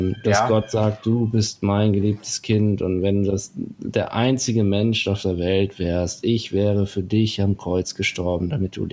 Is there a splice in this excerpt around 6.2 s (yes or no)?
no